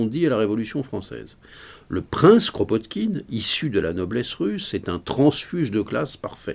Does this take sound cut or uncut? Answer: uncut